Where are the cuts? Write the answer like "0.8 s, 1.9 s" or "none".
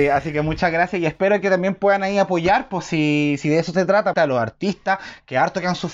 4.1 s